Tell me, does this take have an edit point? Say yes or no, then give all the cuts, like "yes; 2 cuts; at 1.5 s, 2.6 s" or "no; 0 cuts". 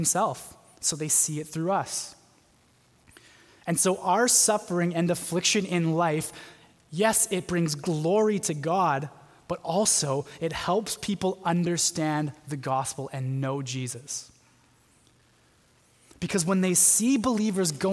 no; 0 cuts